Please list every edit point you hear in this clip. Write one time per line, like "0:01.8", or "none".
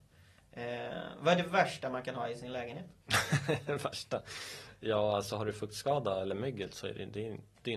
0:03.0